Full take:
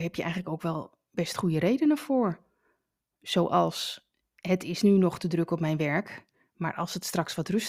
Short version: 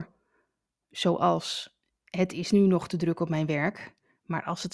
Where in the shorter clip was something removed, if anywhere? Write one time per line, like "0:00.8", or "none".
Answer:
none